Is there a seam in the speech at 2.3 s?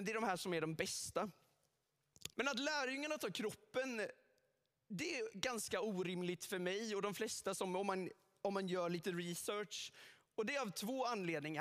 yes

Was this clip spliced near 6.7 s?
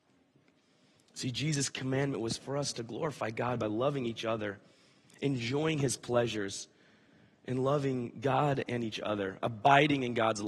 no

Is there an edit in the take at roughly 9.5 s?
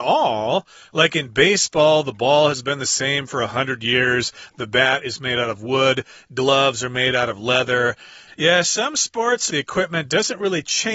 yes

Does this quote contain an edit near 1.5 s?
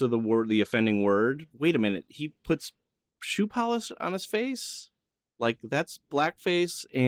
yes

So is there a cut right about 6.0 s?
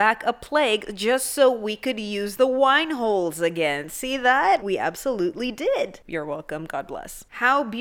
yes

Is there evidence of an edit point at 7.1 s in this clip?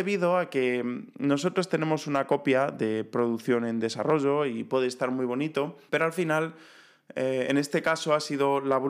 no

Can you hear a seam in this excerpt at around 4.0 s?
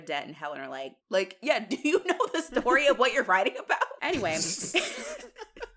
yes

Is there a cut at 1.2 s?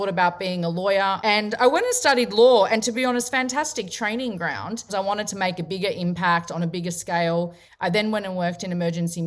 yes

